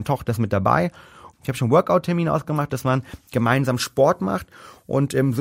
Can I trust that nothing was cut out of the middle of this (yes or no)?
no